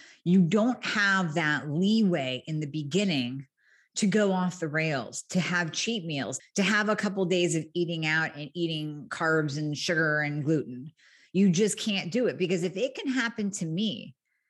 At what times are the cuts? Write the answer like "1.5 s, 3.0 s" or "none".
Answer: 6.4 s